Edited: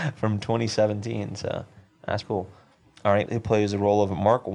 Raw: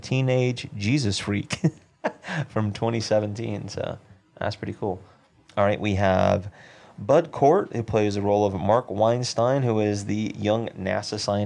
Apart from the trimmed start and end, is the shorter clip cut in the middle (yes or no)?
yes